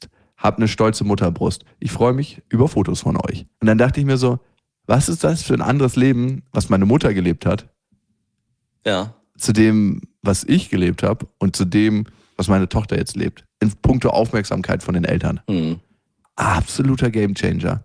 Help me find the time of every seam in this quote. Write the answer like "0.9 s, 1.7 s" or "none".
3.5 s